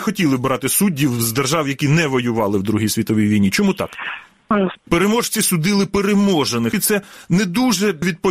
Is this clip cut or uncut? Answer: cut